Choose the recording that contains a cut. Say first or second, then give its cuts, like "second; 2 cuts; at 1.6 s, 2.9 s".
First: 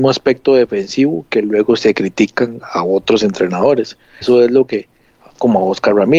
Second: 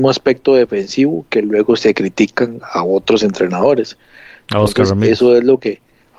first; 1 cut; at 4.2 s